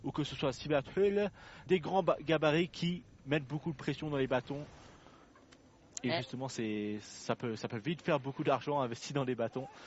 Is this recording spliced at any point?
yes; 1 cut; at 1.7 s

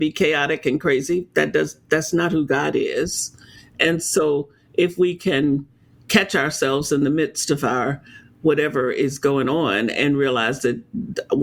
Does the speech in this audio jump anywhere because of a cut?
no; 0 cuts

